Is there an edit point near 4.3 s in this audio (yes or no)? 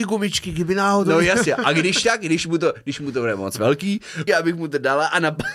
yes